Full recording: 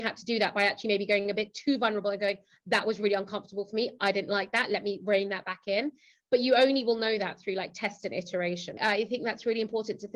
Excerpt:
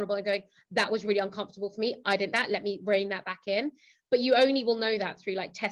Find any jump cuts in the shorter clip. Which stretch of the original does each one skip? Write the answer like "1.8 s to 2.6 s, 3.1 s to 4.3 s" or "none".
4.3 s to 4.5 s